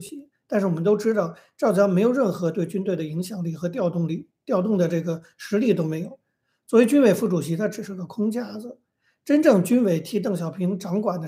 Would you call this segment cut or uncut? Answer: uncut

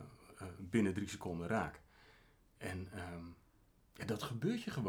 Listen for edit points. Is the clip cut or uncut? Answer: uncut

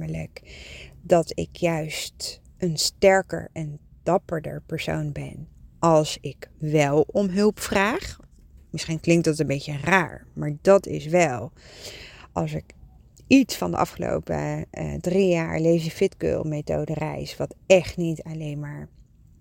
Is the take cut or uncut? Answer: uncut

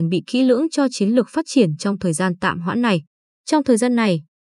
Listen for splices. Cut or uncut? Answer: cut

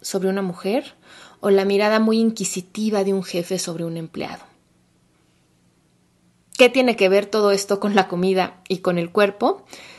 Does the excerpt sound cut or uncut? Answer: uncut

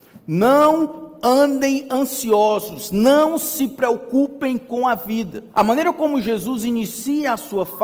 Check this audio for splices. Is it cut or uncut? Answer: cut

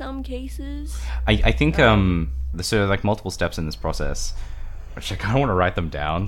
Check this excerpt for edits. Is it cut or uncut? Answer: cut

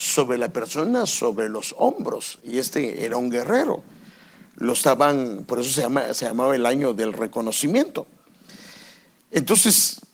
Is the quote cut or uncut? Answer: uncut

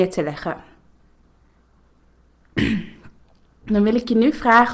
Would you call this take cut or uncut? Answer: uncut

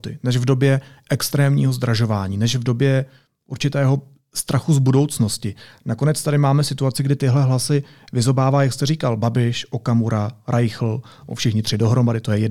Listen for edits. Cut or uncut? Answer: uncut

